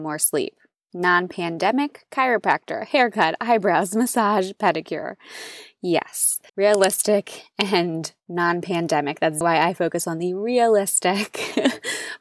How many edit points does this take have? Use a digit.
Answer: 2